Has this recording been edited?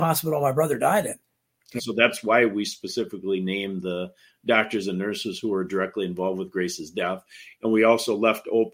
yes; 1 cut; at 1.8 s

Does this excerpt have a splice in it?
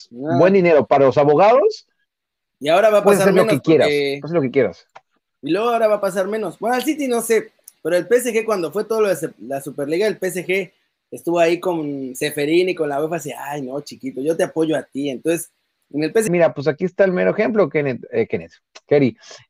yes; 1 cut; at 16.3 s

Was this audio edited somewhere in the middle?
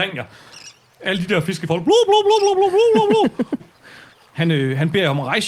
yes; 1 cut; at 3.6 s

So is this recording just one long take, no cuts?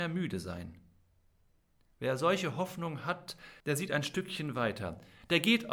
no; 1 cut; at 3.6 s

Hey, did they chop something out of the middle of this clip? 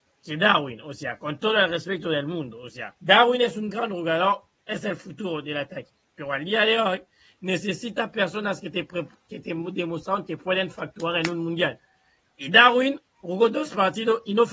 yes; 1 cut; at 3.0 s

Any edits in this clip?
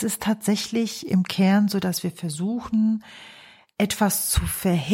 no; 0 cuts

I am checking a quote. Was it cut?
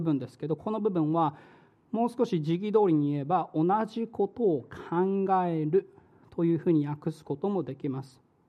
no; 0 cuts

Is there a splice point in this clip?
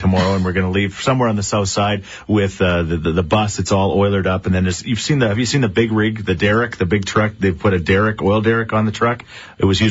no; 0 cuts

